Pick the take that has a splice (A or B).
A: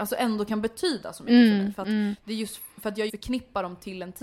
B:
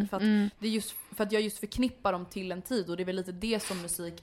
A